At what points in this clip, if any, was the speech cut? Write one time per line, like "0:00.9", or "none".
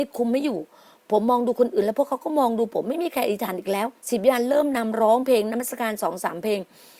0:04.0